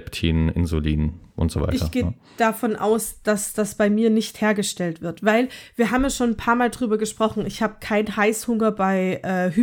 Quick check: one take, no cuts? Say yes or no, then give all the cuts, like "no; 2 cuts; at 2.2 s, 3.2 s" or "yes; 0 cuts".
yes; 0 cuts